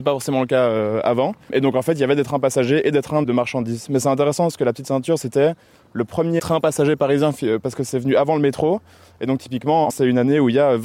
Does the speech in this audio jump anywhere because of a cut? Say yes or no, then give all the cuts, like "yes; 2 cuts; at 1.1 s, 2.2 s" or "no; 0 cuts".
yes; 1 cut; at 9.9 s